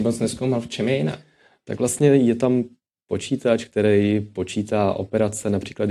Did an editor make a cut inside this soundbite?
no; 0 cuts

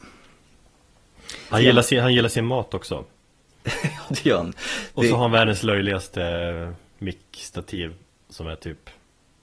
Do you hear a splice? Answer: yes; 1 cut; at 1.5 s

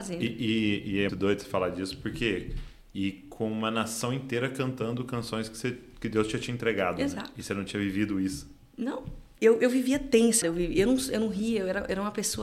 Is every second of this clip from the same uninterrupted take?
no; 3 cuts; at 1.1 s, 9.4 s, 10.4 s

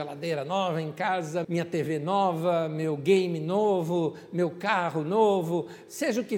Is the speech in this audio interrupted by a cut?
yes; 1 cut; at 1.4 s

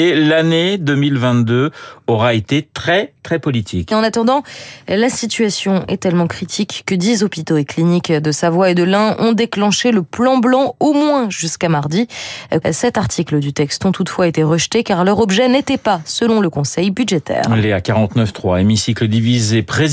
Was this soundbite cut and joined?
yes; 2 cuts; at 3.9 s, 12.6 s

